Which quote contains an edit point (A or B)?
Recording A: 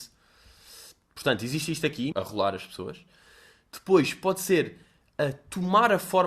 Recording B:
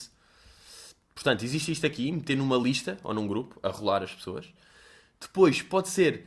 A